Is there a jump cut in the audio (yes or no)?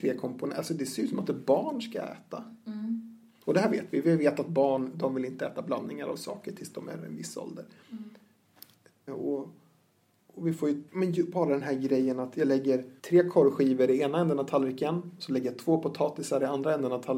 yes